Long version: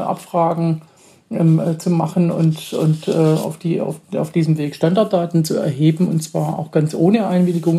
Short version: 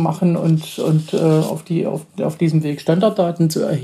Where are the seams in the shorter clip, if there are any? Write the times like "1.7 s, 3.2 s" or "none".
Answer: none